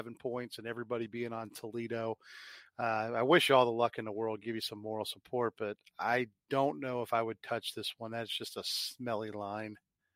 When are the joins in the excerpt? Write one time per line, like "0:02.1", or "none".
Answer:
none